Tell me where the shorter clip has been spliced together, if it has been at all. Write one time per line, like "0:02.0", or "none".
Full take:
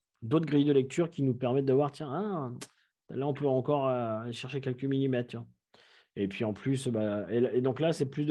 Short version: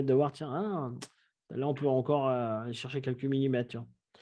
none